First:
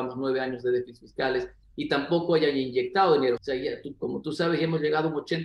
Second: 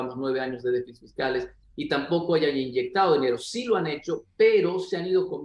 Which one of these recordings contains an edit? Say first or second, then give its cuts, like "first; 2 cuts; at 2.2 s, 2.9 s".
first; 1 cut; at 3.4 s